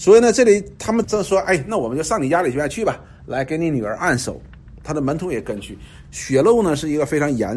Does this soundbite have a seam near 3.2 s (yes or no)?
no